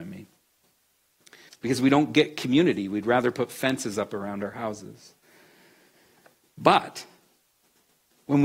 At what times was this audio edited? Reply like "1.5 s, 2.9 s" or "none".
1.5 s